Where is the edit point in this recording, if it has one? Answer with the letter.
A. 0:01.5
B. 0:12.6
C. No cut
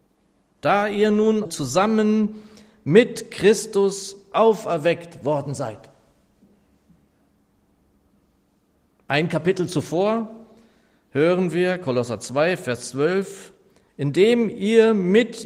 A